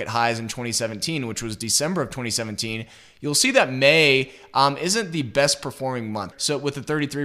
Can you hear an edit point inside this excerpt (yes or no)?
yes